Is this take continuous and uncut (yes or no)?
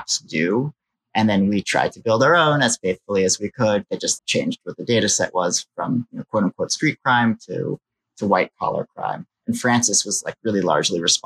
no